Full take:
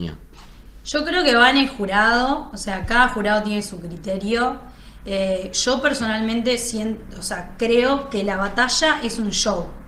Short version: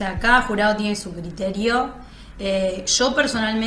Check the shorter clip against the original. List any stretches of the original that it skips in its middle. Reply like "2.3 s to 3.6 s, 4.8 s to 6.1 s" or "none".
none